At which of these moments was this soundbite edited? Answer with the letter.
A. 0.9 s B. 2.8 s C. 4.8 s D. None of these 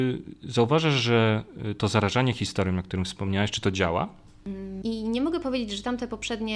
C